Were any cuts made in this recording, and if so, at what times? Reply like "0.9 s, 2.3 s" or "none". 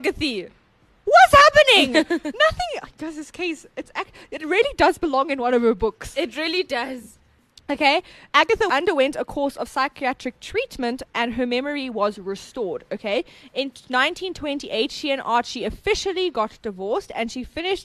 none